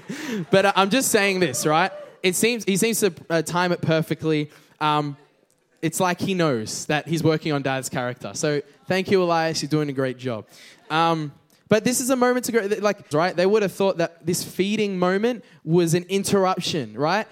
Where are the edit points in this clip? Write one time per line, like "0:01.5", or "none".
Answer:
0:13.1